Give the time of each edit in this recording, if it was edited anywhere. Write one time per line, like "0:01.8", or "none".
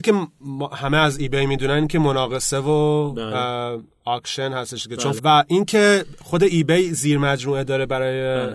0:05.2